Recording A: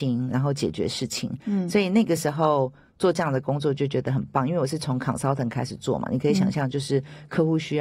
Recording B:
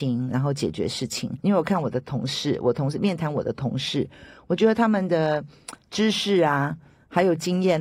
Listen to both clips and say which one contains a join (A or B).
B